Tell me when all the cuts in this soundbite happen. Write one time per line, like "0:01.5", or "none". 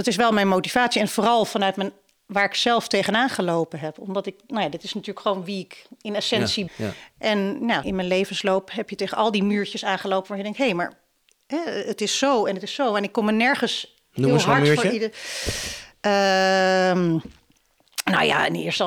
0:06.7
0:07.8